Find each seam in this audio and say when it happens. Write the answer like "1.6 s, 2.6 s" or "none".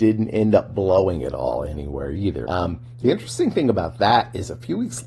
2.5 s